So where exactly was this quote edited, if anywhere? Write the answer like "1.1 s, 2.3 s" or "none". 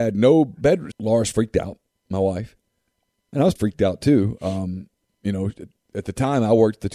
0.9 s, 3.6 s